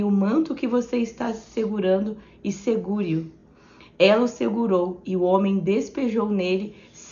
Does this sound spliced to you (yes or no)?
no